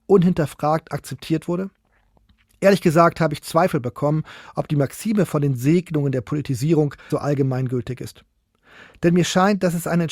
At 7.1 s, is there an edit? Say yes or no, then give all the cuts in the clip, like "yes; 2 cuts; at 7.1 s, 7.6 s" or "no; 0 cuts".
yes; 1 cut; at 7.1 s